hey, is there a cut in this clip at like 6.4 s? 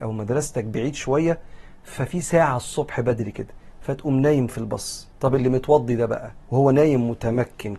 yes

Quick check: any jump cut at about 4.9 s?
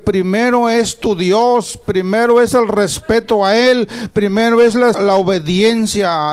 yes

